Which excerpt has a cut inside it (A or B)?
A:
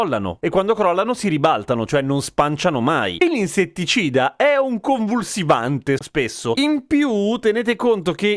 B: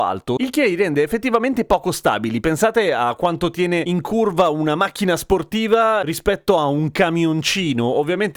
A